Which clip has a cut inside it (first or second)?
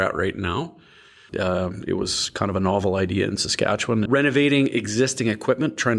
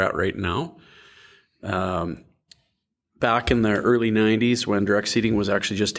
first